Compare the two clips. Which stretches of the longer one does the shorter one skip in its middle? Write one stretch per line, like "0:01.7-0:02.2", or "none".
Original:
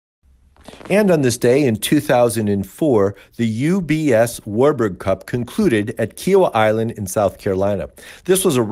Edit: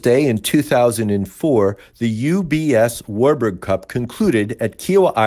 none